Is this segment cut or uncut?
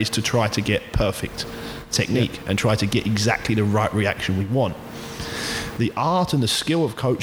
uncut